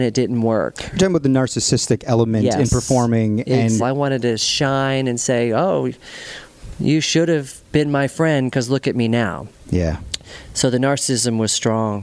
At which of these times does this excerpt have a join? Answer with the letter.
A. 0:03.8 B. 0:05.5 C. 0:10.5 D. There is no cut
A